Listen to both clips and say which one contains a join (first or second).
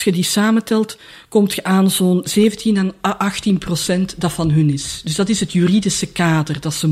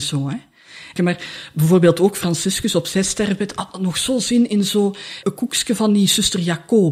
second